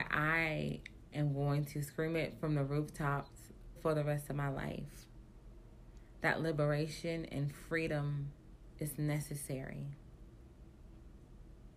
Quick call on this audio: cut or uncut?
cut